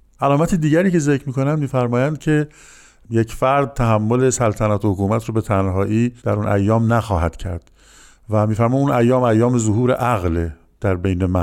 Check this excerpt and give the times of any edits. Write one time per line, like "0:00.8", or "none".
0:06.2